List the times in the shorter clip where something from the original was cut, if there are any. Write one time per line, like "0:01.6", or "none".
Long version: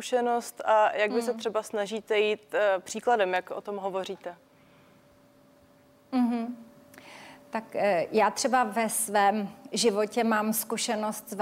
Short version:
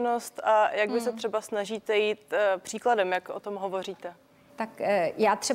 0:04.5